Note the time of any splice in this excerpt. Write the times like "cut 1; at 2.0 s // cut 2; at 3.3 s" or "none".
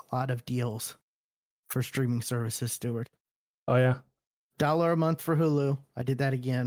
none

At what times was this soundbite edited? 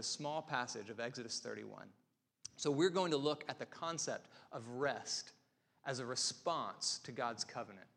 none

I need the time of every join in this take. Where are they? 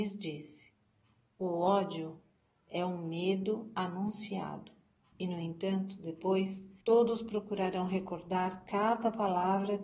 cut 1; at 5.1 s // cut 2; at 6.8 s

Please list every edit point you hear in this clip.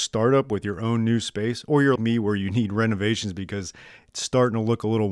cut 1; at 2.0 s

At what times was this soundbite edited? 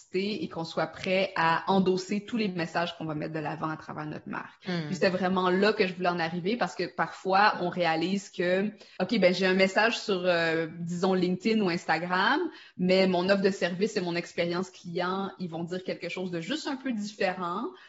none

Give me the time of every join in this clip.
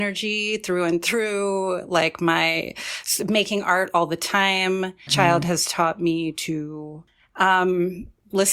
cut 1; at 5.1 s

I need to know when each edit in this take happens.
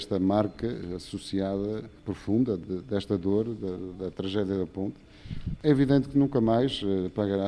cut 1; at 5.6 s

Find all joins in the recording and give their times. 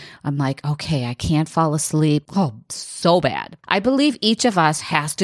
cut 1; at 2.3 s // cut 2; at 3.6 s

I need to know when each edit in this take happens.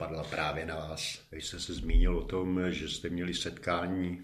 cut 1; at 1.3 s

